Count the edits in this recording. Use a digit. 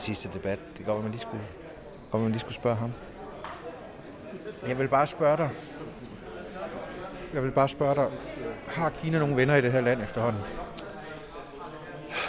0